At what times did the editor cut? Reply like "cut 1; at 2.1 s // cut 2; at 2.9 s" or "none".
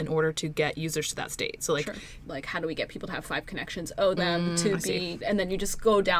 cut 1; at 2.2 s // cut 2; at 4.2 s // cut 3; at 5.2 s